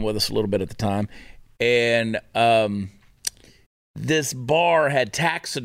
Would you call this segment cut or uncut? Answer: uncut